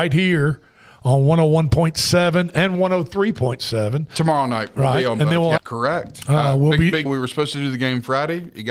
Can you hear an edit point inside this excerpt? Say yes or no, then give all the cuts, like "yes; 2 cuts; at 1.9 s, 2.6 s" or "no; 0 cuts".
yes; 2 cuts; at 5.6 s, 7.1 s